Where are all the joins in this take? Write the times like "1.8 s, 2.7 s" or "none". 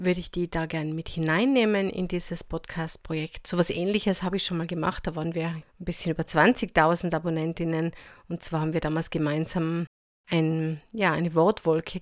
5.6 s